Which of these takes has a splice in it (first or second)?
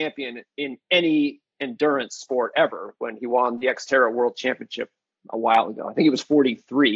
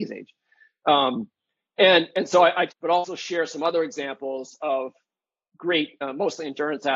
second